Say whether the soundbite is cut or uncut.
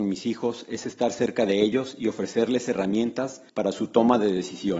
cut